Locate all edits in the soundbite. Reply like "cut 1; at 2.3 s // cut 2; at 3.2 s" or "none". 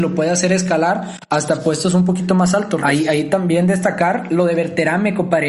cut 1; at 2.8 s

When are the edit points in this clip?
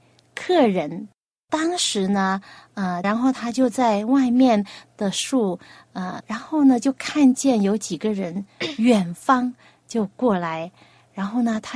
cut 1; at 3.0 s // cut 2; at 6.2 s

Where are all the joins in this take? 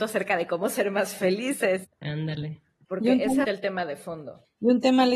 cut 1; at 1.8 s // cut 2; at 3.4 s

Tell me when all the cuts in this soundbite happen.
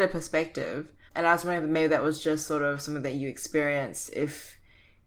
cut 1; at 1.1 s

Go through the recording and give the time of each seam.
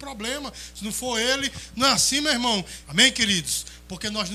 cut 1; at 2.8 s

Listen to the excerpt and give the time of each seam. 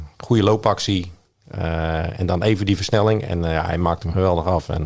none

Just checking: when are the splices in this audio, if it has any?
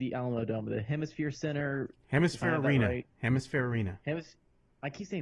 none

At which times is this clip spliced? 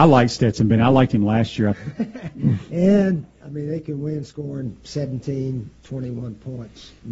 cut 1; at 1.7 s // cut 2; at 3.4 s

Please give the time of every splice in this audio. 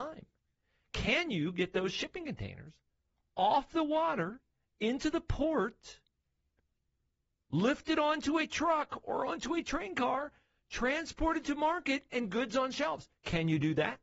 none

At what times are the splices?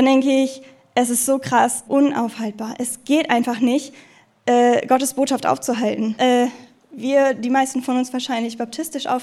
cut 1; at 1.8 s // cut 2; at 6.2 s

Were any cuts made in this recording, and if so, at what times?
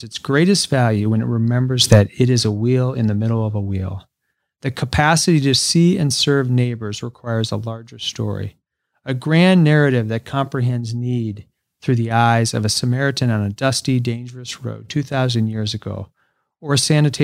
none

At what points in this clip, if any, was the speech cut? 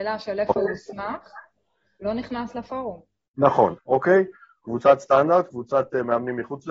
cut 1; at 3.8 s

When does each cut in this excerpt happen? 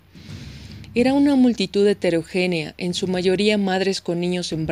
none

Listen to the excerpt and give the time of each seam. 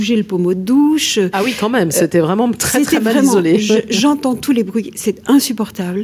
none

